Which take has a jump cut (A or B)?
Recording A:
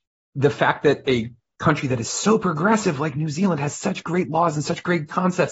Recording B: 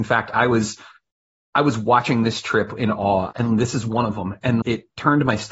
B